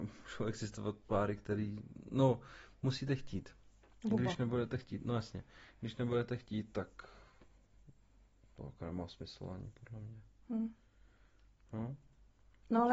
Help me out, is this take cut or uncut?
uncut